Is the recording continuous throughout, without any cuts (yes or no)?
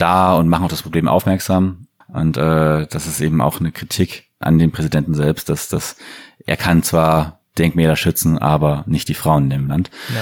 no